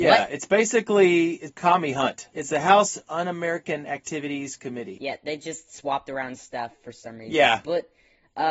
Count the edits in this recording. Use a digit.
1